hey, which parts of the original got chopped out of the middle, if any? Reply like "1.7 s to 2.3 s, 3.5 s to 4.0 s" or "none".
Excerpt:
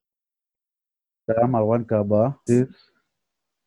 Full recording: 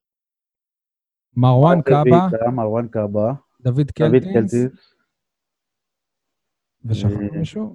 1.3 s to 2.3 s, 3.5 s to 4.5 s